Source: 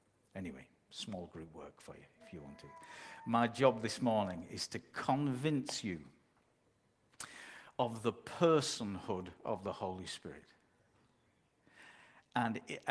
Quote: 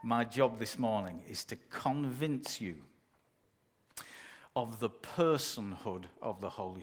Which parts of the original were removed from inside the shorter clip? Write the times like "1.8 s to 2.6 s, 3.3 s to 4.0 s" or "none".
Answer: none